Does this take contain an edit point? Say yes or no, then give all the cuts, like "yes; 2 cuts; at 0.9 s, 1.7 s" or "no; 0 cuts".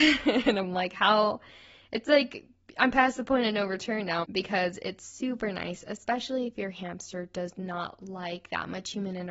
yes; 1 cut; at 4.2 s